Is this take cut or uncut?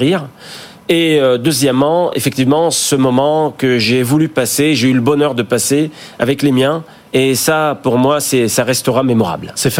uncut